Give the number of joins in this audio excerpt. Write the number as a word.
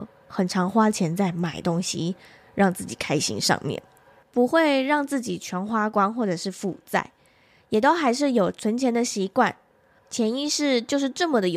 two